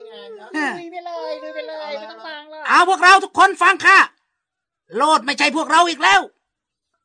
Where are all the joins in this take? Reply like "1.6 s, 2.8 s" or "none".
none